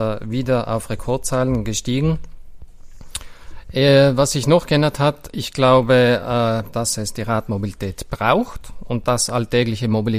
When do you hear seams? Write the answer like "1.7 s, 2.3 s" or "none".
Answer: 6.7 s